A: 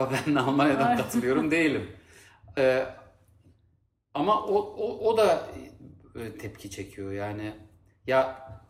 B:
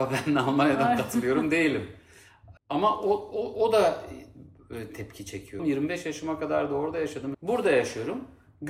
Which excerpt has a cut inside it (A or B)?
B